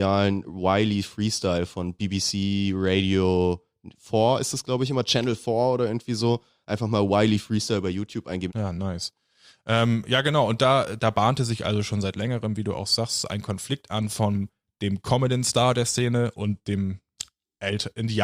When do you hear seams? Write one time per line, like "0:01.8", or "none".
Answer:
0:08.5